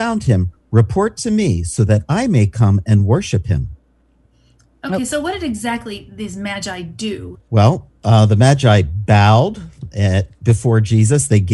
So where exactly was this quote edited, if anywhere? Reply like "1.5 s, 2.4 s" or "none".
7.3 s